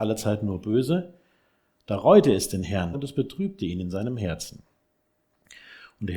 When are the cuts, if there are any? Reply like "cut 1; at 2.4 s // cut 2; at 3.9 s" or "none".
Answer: cut 1; at 2.9 s